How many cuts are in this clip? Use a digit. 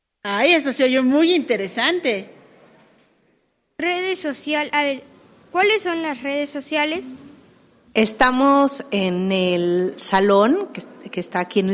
1